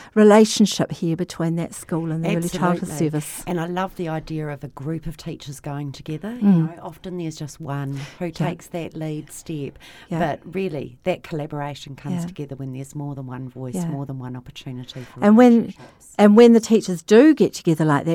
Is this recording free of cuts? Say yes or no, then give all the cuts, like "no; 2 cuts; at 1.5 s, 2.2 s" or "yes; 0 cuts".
yes; 0 cuts